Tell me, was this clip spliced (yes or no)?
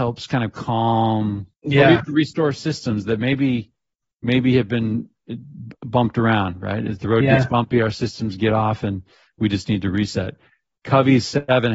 yes